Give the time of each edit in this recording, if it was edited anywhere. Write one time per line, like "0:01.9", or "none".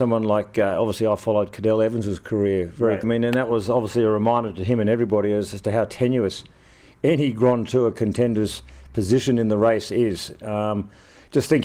0:03.0